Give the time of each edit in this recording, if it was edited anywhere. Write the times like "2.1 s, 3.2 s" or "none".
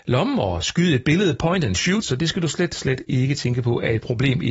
2.0 s